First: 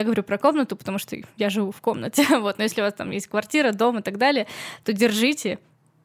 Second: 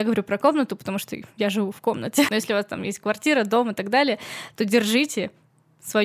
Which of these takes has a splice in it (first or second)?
second